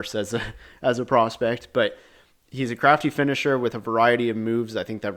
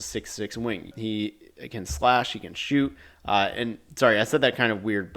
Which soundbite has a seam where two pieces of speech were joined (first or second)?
second